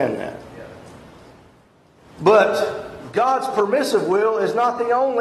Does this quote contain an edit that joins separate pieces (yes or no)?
no